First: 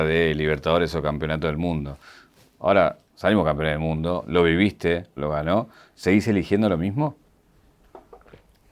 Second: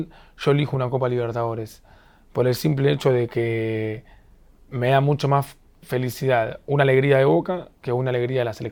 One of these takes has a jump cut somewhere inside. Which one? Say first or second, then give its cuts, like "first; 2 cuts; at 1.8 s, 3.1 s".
first; 1 cut; at 5.2 s